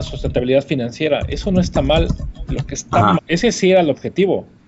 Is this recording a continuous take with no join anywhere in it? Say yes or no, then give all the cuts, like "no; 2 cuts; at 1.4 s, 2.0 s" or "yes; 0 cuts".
no; 1 cut; at 3.2 s